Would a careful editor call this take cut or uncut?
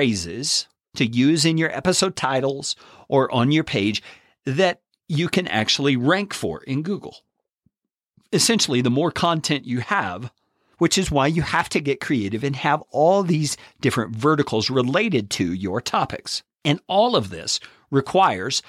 cut